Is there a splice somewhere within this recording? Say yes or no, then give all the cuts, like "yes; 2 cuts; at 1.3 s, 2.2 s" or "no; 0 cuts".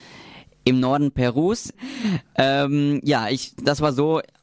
yes; 1 cut; at 1.7 s